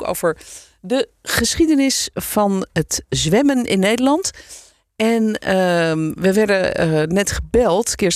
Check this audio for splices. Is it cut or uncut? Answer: uncut